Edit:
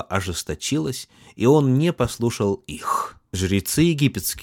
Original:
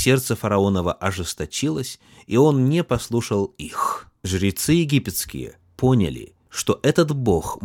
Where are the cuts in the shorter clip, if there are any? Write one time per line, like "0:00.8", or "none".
none